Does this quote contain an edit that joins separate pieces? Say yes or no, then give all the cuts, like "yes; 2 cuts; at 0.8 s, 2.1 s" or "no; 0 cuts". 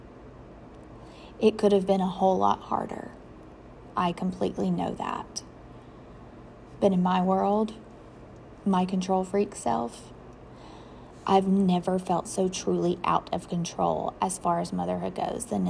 no; 0 cuts